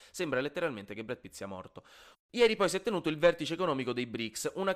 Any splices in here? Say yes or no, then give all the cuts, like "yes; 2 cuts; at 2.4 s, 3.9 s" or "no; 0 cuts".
yes; 1 cut; at 2.1 s